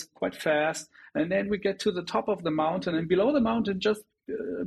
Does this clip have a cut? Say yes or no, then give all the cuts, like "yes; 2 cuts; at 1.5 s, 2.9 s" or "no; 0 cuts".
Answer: no; 0 cuts